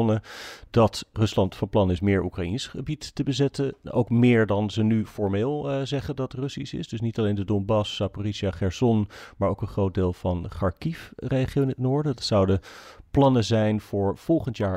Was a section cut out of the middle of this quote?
no; 0 cuts

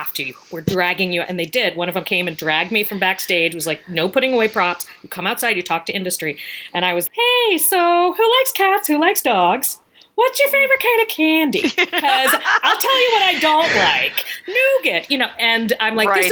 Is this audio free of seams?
no; 1 cut; at 7.1 s

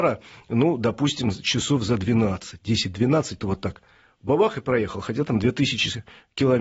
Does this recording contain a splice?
yes; 1 cut; at 3.4 s

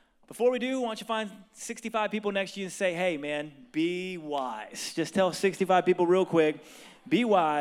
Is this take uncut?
yes; 0 cuts

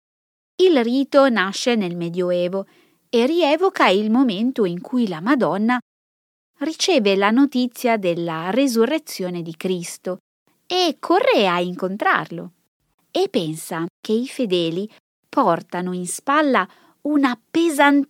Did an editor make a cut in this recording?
yes; 1 cut; at 12.9 s

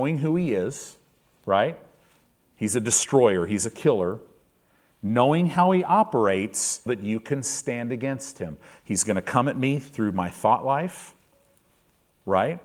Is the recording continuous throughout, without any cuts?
no; 1 cut; at 6.9 s

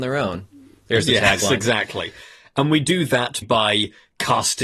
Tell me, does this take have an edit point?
yes; 1 cut; at 3.4 s

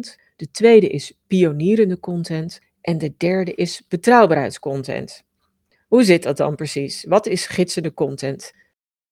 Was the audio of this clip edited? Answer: no; 0 cuts

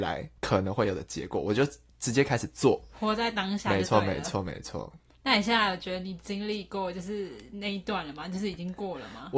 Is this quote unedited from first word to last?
yes; 0 cuts

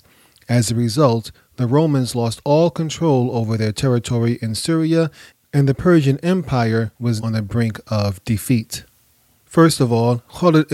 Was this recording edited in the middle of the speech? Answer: yes; 2 cuts; at 7.2 s, 9.4 s

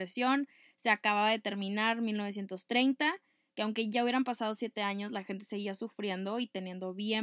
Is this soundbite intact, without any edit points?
yes; 0 cuts

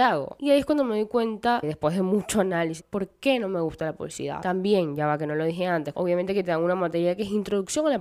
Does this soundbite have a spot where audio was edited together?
yes; 2 cuts; at 2.8 s, 5.9 s

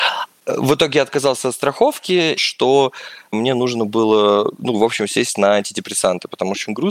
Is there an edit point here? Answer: yes; 1 cut; at 2.4 s

